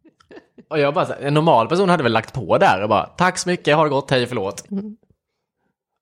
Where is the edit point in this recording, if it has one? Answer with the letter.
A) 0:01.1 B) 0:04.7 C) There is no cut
B